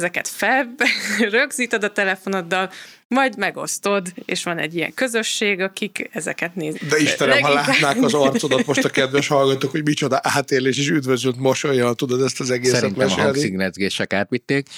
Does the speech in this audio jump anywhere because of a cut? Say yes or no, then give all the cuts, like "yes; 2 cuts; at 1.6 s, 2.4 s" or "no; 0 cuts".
yes; 1 cut; at 6.7 s